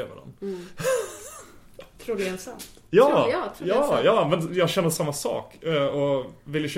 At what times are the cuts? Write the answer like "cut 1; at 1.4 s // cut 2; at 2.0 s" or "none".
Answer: none